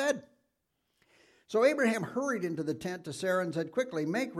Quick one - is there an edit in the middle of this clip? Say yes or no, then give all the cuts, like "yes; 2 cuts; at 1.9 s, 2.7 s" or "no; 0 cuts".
no; 0 cuts